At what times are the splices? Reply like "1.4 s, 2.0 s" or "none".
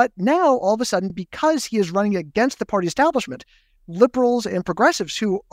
none

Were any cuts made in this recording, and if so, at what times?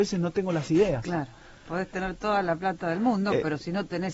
none

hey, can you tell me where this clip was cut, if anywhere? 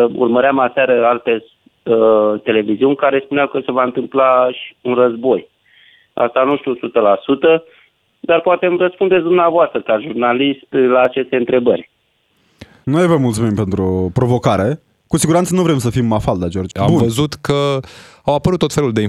12.8 s, 16.7 s

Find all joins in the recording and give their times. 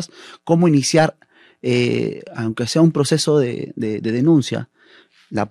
none

